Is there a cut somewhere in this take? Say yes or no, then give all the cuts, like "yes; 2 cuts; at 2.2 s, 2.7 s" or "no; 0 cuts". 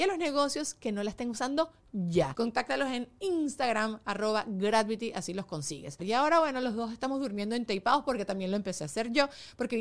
yes; 2 cuts; at 2.3 s, 6.0 s